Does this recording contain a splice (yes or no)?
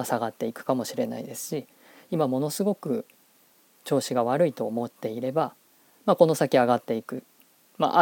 no